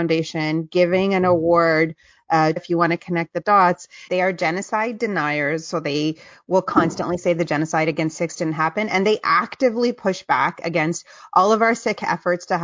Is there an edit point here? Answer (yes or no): yes